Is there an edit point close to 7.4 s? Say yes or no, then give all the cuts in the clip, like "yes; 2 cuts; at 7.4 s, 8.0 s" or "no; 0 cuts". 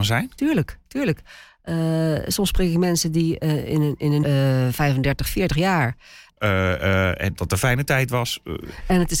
yes; 3 cuts; at 4.2 s, 6.3 s, 7.4 s